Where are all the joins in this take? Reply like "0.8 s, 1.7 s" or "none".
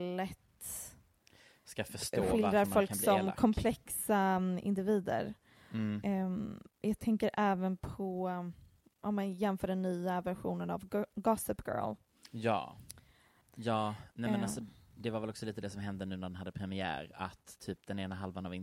13.4 s